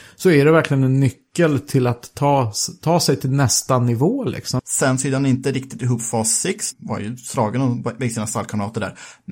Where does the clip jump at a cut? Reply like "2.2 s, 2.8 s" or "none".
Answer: 4.6 s, 6.7 s